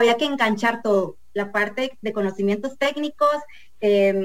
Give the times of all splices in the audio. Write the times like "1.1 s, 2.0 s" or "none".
none